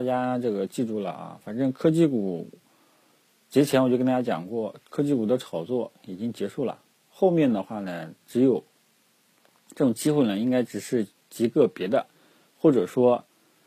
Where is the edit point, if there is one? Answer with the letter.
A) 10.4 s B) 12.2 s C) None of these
C